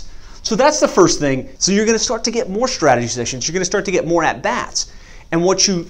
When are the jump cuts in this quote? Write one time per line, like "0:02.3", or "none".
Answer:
0:01.6